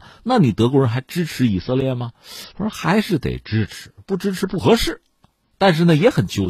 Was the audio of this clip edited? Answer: no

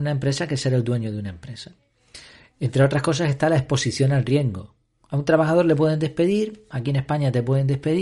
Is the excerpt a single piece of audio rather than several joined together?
yes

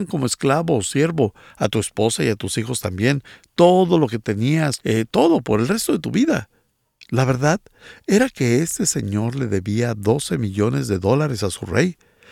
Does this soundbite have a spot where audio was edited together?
yes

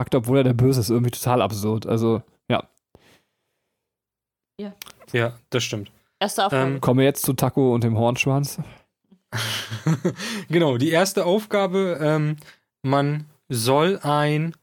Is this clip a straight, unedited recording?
yes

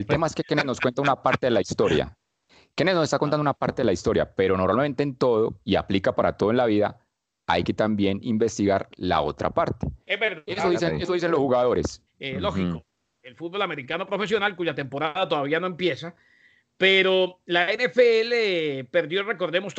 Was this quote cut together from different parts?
yes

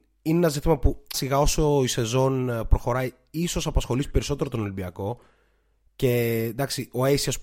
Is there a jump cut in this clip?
yes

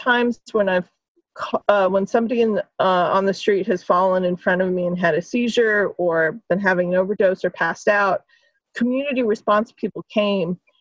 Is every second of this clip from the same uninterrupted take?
yes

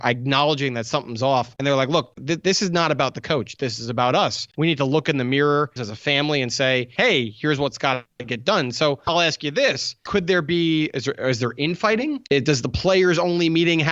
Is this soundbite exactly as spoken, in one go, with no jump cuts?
no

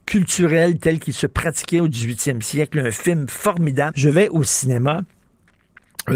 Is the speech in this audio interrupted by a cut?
yes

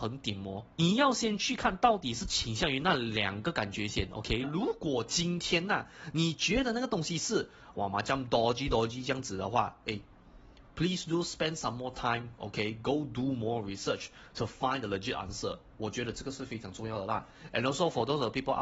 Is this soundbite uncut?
no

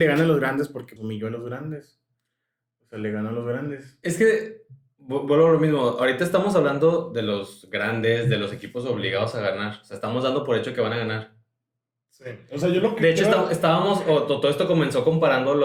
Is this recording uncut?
no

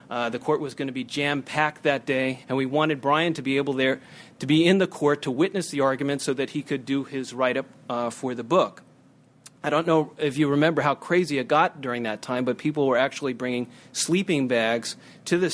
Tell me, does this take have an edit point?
yes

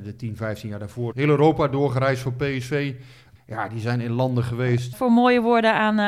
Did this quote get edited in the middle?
yes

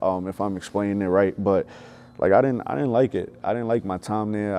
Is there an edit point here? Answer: no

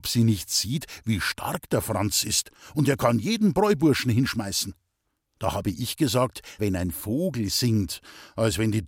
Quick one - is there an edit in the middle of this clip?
yes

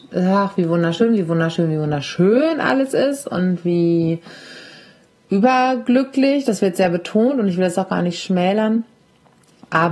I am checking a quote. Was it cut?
no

